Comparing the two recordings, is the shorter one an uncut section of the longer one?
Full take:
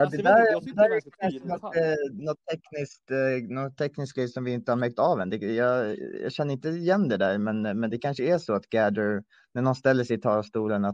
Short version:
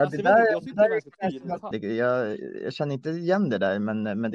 no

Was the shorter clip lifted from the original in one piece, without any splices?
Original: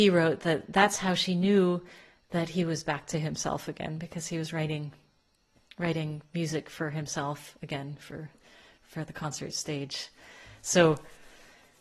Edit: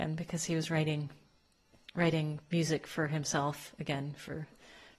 yes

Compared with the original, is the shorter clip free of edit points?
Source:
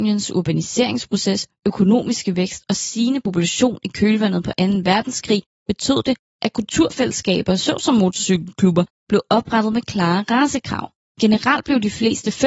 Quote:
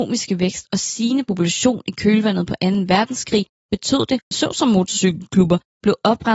no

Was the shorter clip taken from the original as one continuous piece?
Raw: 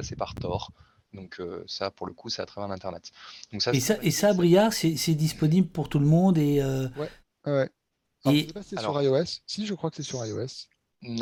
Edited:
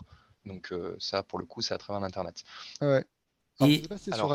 no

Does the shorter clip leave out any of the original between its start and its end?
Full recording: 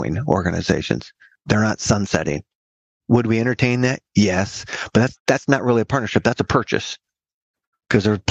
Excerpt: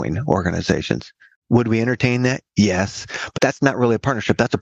yes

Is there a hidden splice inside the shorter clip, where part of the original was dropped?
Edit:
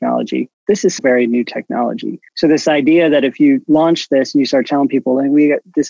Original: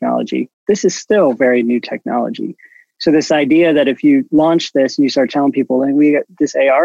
yes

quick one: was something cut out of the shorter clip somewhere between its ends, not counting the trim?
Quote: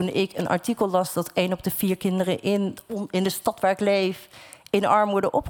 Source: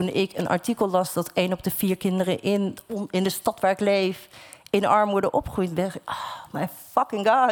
no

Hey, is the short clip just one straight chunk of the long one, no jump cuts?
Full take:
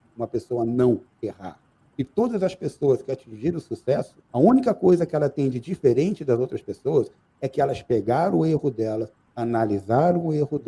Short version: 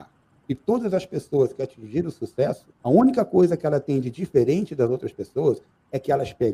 yes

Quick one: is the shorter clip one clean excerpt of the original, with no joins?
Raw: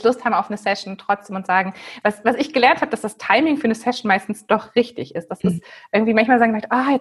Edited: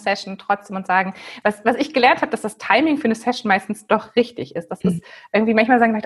yes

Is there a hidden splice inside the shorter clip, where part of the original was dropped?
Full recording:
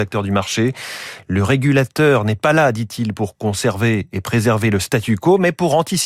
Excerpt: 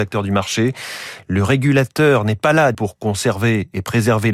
yes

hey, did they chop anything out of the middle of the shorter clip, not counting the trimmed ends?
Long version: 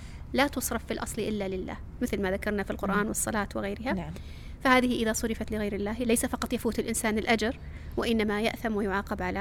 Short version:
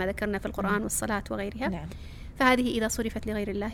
no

